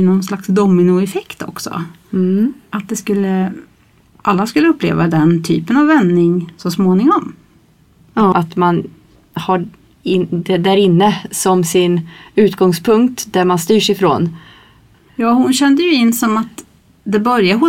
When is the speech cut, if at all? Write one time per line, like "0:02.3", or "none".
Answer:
0:08.3
0:14.9